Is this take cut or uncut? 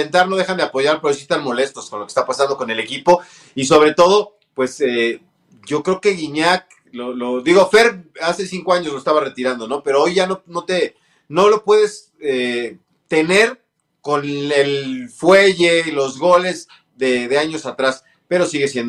uncut